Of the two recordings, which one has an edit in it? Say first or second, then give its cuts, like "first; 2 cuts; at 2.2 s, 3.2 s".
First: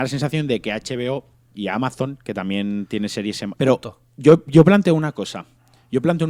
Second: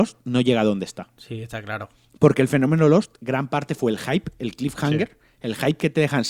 first; 1 cut; at 3.6 s